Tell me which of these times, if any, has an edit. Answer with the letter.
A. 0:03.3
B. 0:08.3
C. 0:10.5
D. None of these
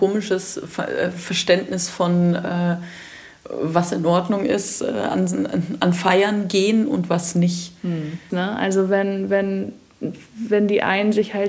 B